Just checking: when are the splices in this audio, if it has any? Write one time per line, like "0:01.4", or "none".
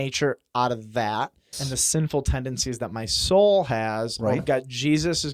0:01.5
0:04.4